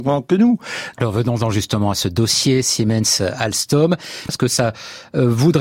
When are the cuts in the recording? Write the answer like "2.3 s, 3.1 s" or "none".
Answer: 0.9 s, 4.3 s